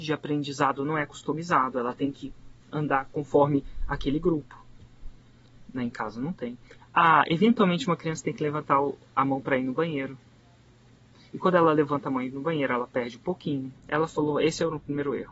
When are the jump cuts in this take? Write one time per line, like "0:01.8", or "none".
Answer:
0:06.8
0:13.8